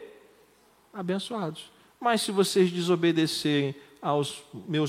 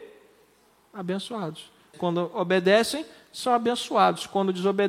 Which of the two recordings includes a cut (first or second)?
second